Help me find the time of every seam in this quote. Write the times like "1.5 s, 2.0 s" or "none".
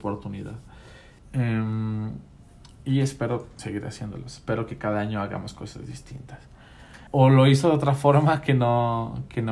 1.2 s, 7.1 s